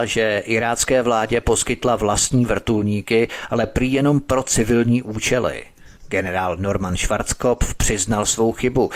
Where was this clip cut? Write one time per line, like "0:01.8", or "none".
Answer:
0:06.0